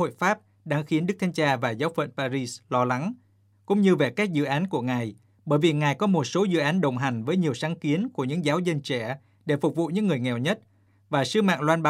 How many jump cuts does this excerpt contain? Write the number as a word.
zero